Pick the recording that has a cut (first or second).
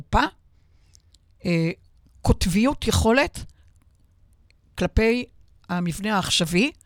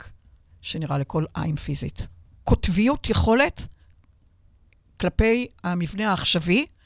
second